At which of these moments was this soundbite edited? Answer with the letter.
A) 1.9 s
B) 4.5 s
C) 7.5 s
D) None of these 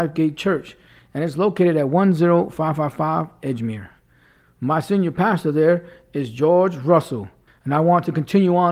C